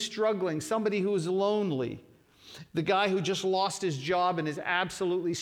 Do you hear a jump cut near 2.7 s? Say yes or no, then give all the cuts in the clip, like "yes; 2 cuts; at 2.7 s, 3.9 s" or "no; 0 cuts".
yes; 1 cut; at 2.7 s